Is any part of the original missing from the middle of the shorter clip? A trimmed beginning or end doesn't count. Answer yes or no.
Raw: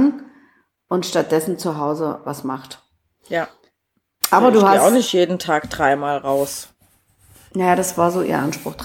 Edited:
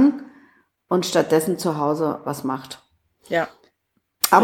no